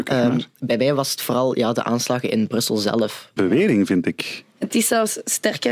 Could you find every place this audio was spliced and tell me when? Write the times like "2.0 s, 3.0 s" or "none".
3.4 s